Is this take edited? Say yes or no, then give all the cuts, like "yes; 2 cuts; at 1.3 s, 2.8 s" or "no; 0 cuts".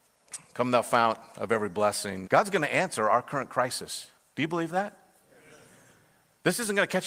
yes; 1 cut; at 2.2 s